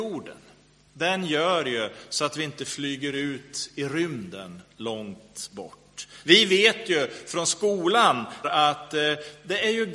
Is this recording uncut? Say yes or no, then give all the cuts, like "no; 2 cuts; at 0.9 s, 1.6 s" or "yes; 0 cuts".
no; 2 cuts; at 6.2 s, 8.4 s